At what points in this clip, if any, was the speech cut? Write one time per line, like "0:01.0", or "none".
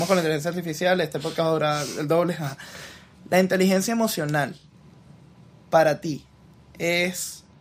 none